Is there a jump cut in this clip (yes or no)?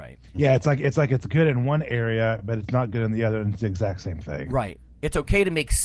no